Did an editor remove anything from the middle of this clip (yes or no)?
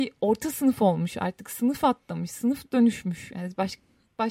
no